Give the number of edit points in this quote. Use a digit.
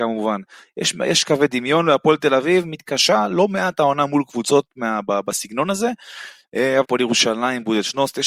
1